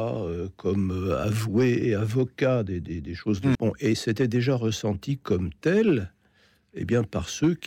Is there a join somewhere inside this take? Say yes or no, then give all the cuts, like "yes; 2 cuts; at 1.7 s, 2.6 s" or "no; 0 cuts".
yes; 1 cut; at 3.5 s